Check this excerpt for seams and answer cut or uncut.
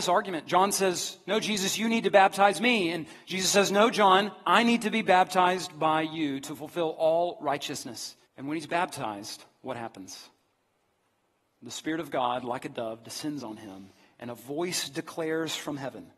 cut